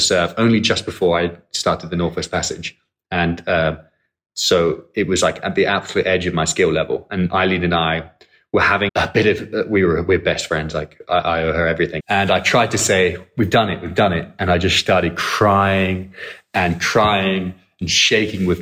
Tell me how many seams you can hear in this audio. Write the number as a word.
two